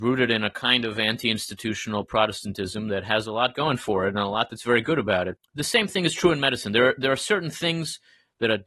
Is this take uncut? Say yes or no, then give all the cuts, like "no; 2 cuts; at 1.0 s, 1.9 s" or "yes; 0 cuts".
no; 1 cut; at 5.4 s